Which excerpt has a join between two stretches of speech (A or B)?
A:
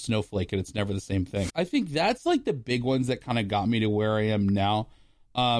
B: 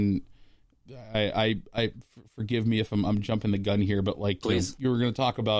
A